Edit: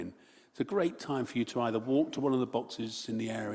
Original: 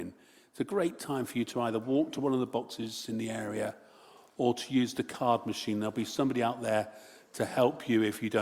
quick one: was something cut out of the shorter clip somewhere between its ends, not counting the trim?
no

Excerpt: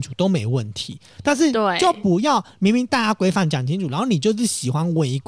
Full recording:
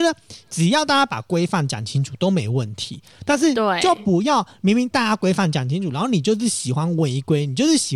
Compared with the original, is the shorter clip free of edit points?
yes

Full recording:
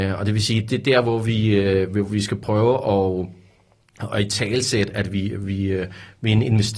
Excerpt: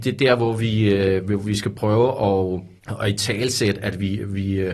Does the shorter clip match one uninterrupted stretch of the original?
no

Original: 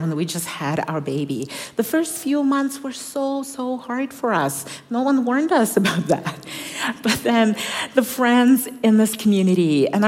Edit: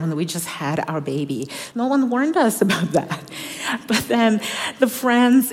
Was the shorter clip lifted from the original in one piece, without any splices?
no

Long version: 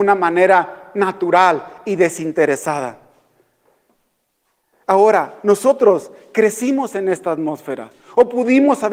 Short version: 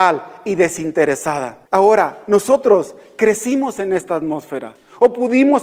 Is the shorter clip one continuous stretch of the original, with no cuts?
no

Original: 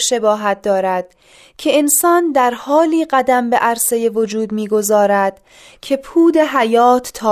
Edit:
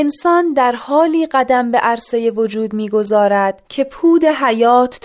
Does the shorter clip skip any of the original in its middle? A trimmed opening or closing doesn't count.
yes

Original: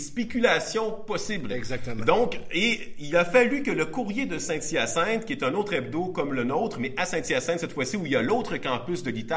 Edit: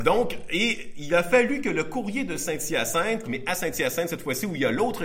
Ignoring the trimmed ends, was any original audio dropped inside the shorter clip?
yes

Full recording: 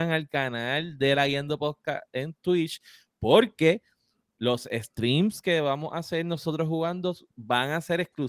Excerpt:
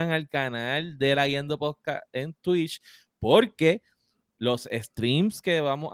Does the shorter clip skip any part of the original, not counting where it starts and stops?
no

